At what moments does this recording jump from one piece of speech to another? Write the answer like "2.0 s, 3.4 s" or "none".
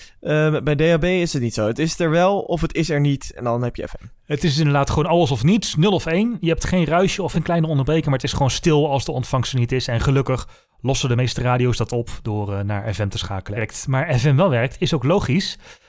7.3 s, 13.6 s

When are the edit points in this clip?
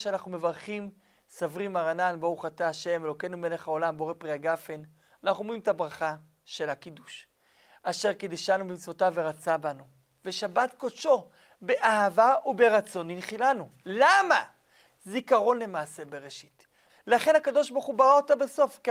14.9 s, 16.9 s

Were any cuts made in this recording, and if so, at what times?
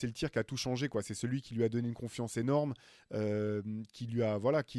none

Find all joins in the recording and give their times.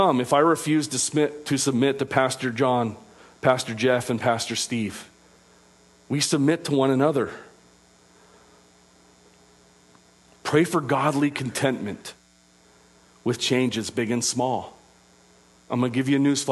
15.5 s

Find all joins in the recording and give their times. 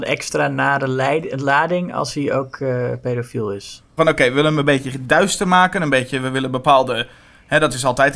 4.0 s

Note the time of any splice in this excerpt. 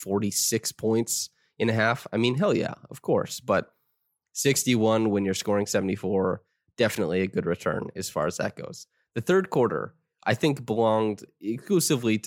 none

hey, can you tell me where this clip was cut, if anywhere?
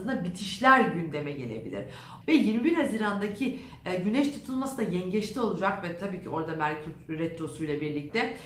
2.2 s

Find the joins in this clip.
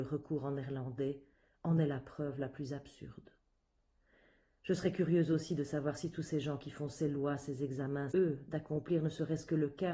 8.1 s

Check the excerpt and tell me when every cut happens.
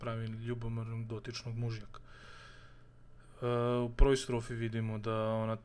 none

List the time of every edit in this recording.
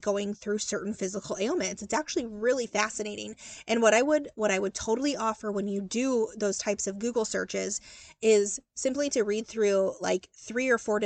none

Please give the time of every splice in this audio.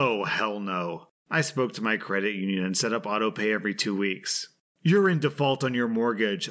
4.7 s

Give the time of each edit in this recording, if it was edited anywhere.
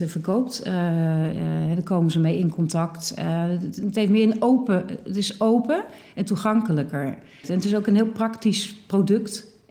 7.4 s

